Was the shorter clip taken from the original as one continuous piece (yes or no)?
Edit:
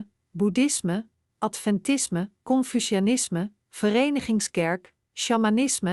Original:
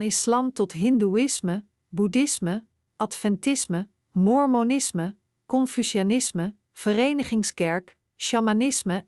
no